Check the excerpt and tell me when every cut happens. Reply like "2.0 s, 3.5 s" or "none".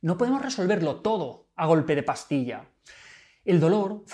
none